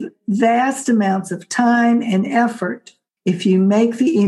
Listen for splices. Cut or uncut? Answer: cut